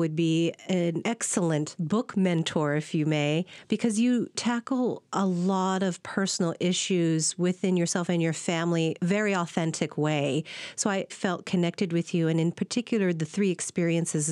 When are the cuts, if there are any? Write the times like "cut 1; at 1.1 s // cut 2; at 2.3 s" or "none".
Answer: cut 1; at 11.1 s